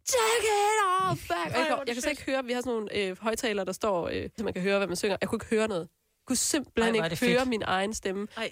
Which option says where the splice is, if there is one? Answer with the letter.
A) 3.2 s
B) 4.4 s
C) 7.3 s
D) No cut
B